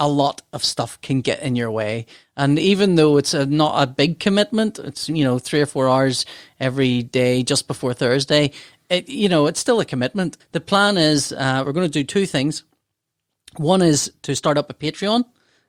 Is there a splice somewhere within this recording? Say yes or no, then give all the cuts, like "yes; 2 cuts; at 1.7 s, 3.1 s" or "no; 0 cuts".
yes; 1 cut; at 10.4 s